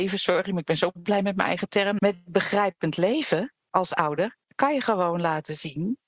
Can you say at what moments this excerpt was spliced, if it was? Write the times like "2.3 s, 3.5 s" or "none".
2.0 s, 4.4 s